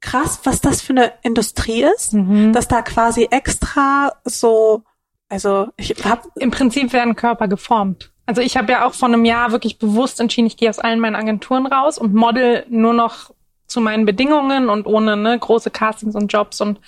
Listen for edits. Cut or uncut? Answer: uncut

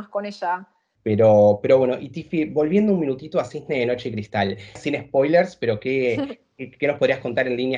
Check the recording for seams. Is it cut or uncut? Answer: cut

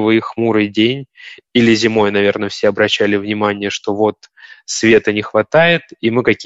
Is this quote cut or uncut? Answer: uncut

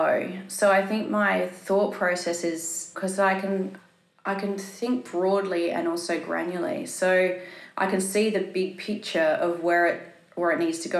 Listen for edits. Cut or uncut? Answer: uncut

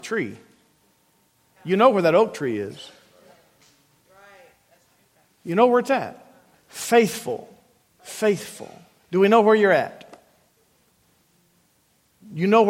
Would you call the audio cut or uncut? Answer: cut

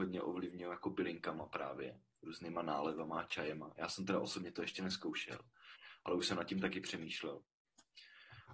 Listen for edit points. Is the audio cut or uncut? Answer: uncut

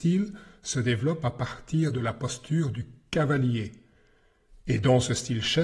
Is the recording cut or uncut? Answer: uncut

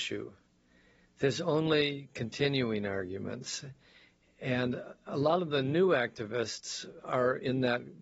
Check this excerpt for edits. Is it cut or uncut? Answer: uncut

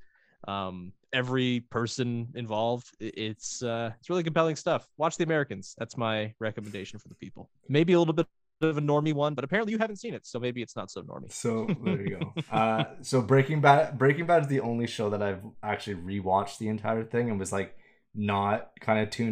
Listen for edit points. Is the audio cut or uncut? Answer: uncut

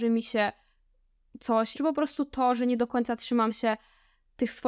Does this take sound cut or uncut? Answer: cut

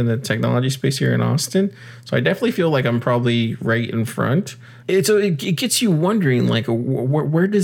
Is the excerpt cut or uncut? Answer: cut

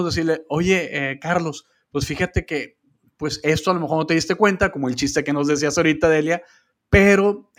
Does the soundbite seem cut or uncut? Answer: uncut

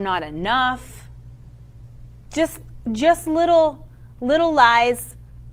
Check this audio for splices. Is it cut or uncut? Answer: uncut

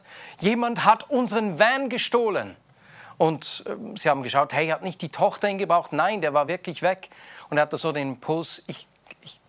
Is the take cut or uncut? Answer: uncut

